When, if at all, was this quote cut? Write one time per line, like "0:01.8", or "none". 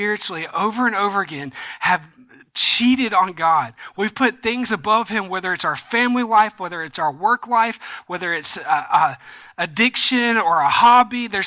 none